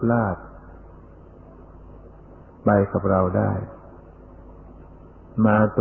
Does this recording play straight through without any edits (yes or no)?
yes